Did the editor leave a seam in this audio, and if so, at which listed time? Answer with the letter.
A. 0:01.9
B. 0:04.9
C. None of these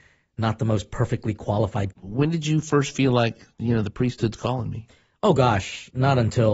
A